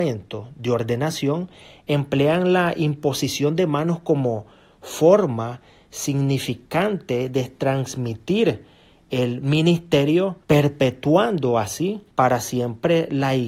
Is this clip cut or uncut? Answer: cut